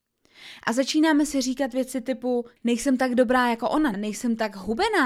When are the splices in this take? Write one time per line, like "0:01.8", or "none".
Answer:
0:02.6
0:03.9